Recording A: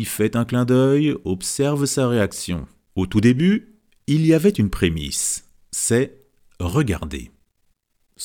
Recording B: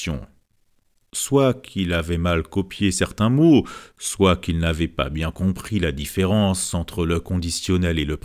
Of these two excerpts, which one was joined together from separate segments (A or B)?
A